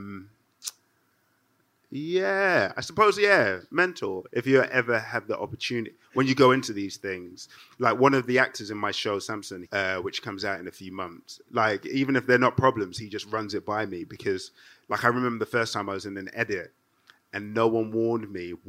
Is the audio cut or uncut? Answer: cut